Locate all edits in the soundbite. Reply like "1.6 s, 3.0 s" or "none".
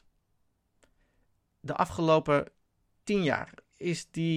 3.0 s